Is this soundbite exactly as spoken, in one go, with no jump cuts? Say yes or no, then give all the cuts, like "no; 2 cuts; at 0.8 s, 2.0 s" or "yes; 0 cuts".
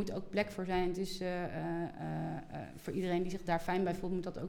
yes; 0 cuts